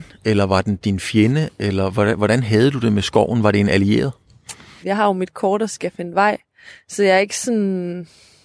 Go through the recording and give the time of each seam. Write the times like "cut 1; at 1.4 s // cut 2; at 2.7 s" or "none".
cut 1; at 4.8 s